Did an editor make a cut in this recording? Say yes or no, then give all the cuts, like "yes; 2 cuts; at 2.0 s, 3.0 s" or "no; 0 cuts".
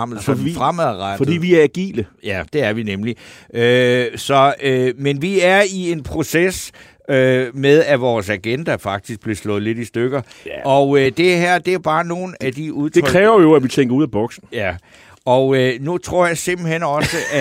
no; 0 cuts